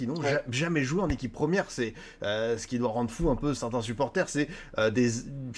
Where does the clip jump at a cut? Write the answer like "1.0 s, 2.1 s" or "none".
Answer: 3.6 s